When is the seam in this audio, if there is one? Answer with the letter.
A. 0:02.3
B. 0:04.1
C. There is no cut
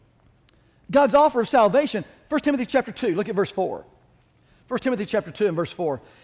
C